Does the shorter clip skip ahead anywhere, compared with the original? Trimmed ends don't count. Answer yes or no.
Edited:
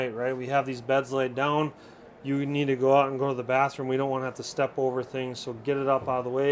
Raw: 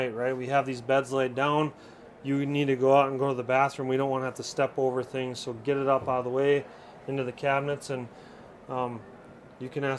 no